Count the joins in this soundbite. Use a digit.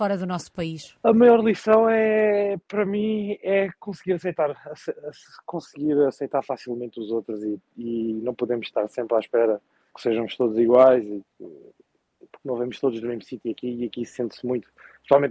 0